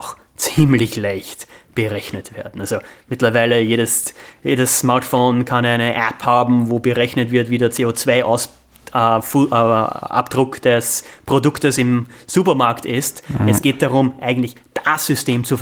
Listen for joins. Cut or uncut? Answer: uncut